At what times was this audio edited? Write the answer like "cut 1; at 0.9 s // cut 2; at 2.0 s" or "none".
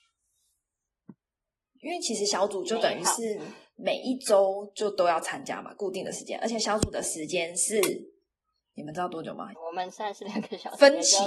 cut 1; at 9.5 s

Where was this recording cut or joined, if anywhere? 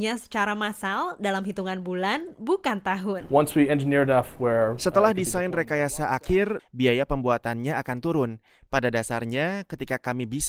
cut 1; at 6.6 s

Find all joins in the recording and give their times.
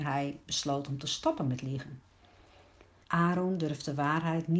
cut 1; at 3.0 s

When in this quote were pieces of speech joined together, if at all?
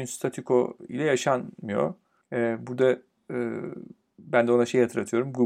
cut 1; at 2.2 s

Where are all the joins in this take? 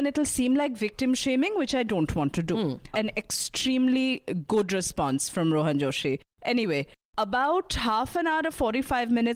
cut 1; at 2.9 s

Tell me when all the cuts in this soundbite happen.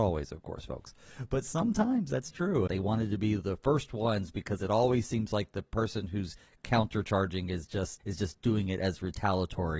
cut 1; at 2.7 s // cut 2; at 8.0 s

